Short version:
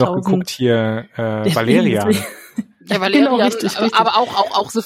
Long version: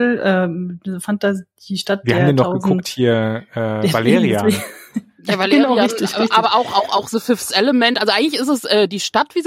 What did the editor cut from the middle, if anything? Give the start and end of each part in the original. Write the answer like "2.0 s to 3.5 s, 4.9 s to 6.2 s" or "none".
none